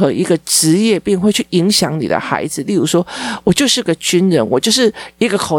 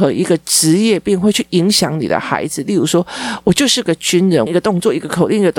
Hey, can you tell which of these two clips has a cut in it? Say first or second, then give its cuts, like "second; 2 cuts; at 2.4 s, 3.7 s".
second; 1 cut; at 4.5 s